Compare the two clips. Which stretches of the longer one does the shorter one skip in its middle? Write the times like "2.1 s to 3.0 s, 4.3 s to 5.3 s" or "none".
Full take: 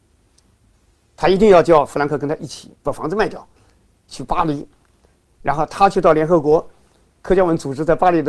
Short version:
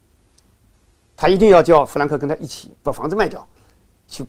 none